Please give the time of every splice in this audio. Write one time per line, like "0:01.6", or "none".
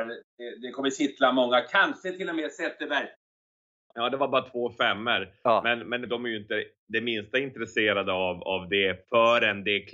0:03.9
0:06.1